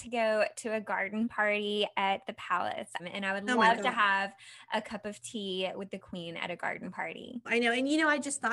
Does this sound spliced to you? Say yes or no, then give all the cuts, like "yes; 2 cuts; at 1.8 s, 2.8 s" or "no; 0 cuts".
yes; 2 cuts; at 3.0 s, 7.5 s